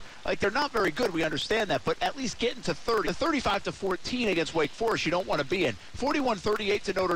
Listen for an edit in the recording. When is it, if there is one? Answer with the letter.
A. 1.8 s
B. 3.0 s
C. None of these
B